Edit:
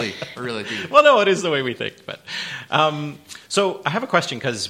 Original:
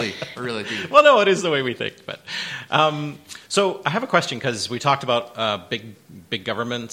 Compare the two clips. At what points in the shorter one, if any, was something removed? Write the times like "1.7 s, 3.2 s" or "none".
none